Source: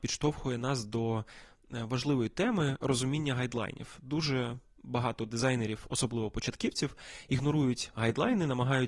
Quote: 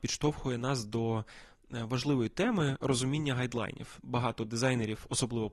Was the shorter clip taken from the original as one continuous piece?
no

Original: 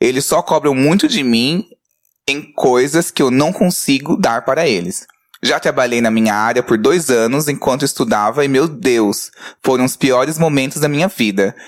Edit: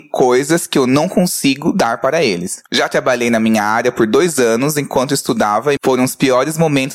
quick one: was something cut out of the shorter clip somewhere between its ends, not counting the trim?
yes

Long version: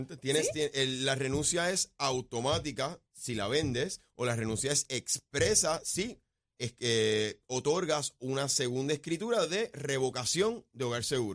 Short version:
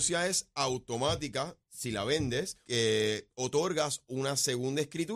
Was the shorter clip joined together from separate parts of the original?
yes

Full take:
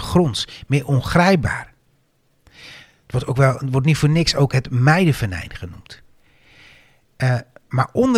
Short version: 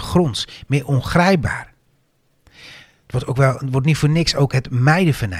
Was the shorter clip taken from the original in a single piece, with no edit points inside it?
yes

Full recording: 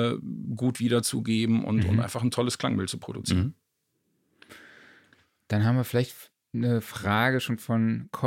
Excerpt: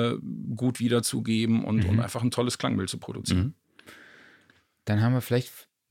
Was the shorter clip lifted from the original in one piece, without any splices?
no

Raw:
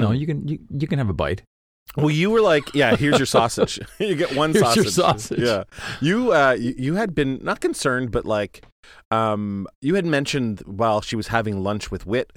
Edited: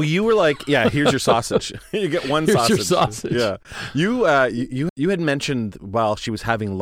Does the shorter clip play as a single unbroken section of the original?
no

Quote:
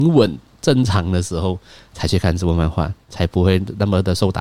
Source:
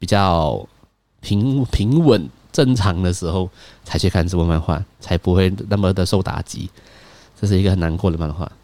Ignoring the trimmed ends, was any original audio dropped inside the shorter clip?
no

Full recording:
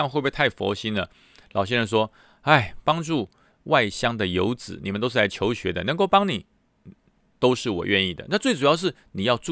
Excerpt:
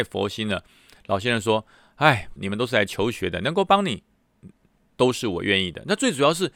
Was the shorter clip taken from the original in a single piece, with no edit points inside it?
no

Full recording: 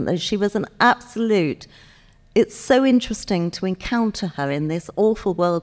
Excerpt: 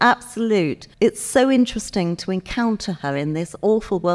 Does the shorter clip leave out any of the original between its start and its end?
yes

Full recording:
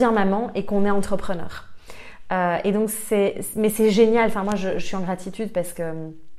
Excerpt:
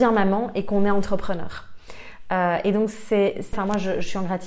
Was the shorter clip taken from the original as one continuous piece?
no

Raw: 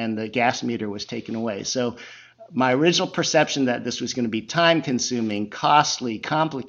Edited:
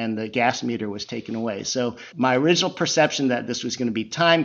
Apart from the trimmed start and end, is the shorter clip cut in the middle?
yes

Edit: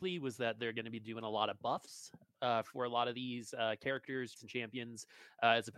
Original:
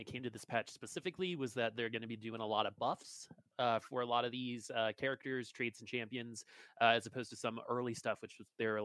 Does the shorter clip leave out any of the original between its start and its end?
yes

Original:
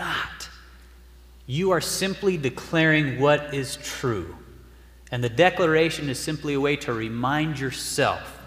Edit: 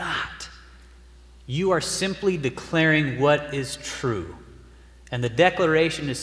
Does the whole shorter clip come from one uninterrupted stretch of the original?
yes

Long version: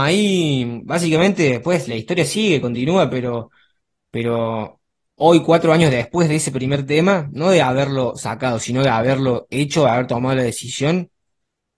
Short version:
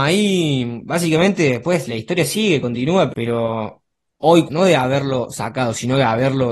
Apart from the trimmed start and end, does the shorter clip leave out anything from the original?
yes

